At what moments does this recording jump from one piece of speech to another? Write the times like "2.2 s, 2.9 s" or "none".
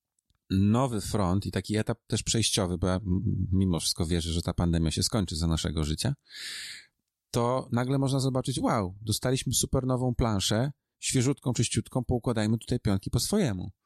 none